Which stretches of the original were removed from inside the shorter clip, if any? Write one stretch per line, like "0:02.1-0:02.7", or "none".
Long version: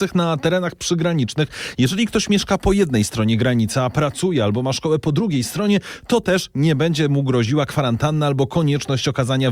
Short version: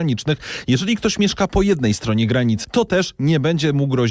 0:03.7-0:06.0